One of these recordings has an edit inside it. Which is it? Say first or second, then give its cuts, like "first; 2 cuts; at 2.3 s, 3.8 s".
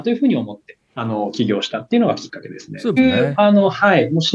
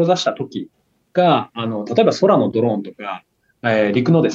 first; 1 cut; at 3.0 s